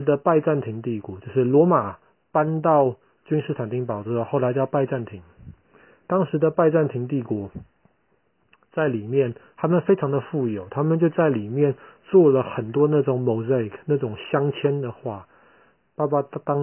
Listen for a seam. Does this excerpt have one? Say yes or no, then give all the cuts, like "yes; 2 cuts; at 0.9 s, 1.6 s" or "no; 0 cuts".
no; 0 cuts